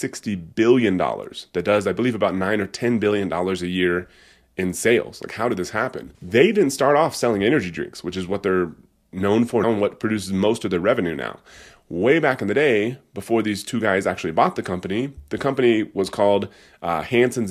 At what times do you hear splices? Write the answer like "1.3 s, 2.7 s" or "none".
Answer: 6.1 s, 9.6 s